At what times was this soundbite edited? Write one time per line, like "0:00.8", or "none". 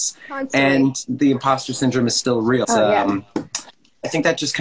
0:02.6